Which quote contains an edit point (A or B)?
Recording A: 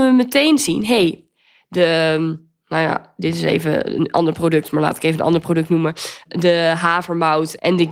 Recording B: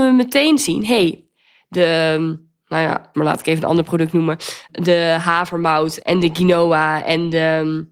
B